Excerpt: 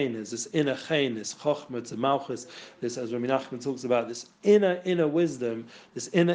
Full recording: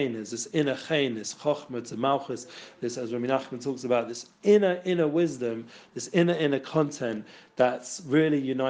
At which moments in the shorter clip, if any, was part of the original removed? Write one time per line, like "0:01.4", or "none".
none